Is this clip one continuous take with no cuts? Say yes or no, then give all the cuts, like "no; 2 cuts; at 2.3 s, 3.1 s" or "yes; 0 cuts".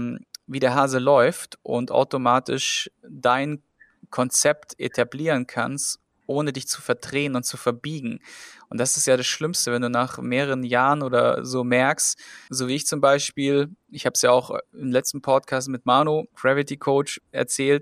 no; 2 cuts; at 12.5 s, 16.3 s